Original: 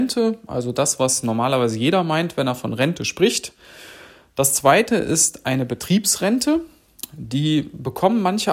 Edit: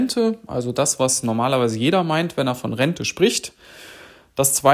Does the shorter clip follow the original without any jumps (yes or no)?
yes